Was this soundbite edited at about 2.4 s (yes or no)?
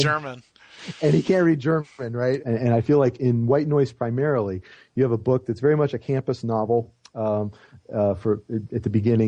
yes